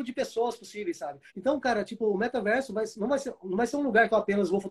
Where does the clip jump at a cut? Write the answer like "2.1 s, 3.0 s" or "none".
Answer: 1.3 s